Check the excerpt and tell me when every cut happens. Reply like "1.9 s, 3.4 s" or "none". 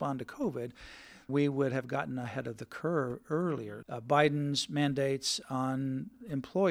1.3 s, 3.8 s